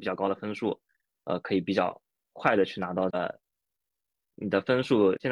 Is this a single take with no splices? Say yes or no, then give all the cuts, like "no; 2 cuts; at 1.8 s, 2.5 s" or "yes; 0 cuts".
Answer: no; 1 cut; at 3.1 s